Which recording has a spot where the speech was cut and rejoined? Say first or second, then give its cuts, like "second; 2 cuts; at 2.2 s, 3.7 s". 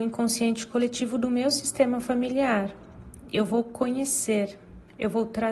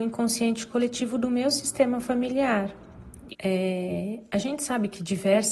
second; 1 cut; at 3.3 s